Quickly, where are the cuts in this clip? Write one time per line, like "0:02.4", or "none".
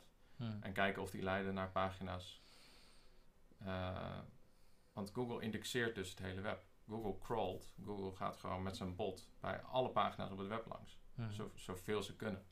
none